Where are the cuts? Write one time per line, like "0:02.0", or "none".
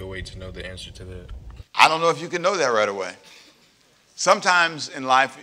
0:01.7

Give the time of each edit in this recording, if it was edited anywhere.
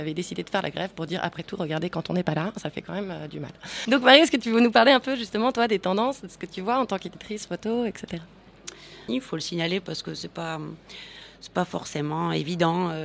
0:03.9
0:09.1

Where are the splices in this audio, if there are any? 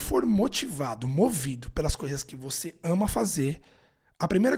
none

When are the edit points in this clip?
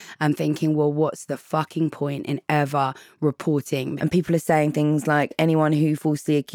0:04.0

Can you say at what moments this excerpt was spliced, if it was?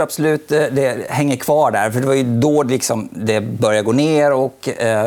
none

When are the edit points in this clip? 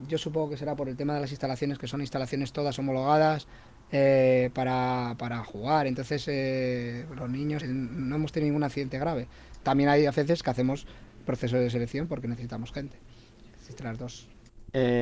0:07.6
0:09.6

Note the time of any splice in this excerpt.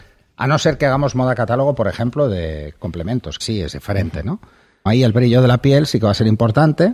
0:03.4
0:04.9

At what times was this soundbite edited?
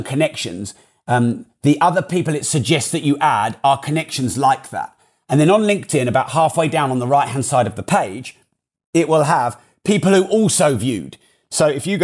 none

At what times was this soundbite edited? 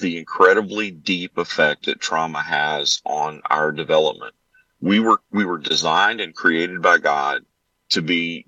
none

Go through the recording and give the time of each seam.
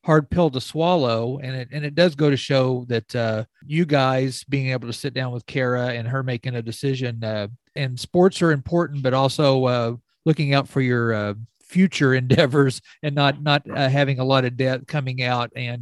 0:07.8

